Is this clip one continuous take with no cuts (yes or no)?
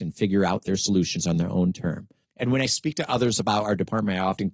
no